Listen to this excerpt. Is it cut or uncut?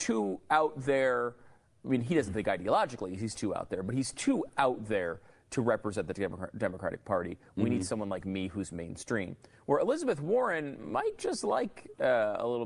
uncut